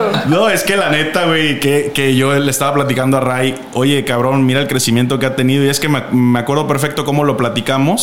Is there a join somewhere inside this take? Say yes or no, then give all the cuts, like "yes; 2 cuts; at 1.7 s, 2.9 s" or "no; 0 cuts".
no; 0 cuts